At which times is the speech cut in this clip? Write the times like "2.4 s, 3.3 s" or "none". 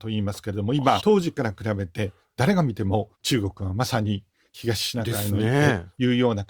1.0 s, 3.1 s

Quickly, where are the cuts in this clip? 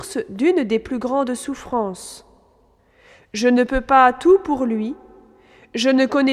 none

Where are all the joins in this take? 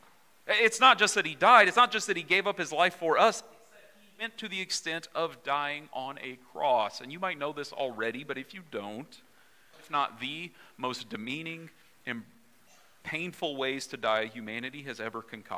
9.7 s

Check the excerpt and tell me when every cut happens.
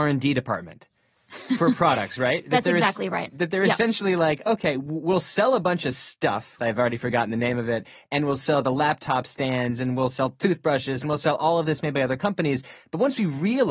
6.6 s

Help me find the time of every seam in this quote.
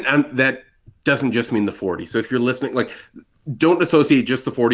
none

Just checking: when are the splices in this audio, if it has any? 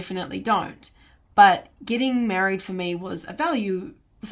none

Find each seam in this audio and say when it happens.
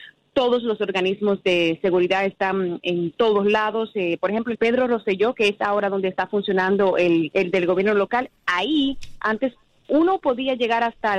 4.6 s, 7.3 s

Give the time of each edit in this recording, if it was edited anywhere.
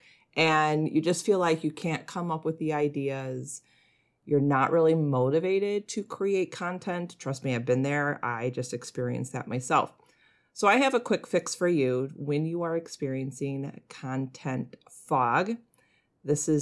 none

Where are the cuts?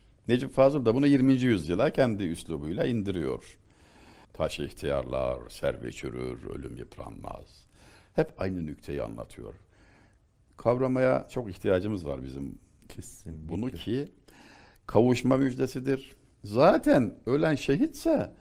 4.2 s

